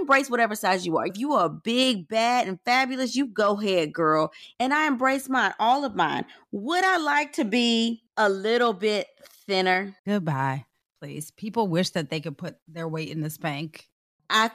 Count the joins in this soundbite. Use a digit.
3